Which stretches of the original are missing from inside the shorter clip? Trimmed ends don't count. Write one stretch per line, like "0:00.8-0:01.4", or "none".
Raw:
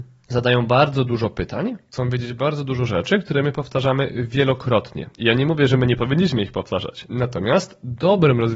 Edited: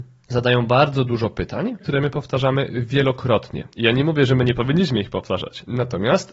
0:01.8-0:03.2